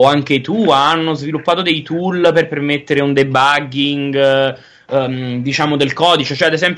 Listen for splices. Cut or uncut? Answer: uncut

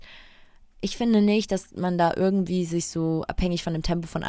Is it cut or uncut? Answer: uncut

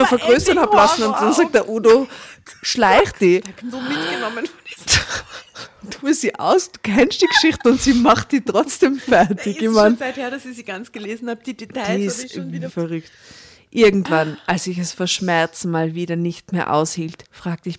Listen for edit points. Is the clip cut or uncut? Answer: cut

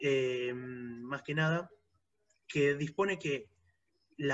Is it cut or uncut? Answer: cut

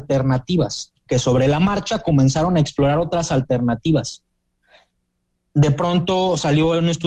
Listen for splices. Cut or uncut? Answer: cut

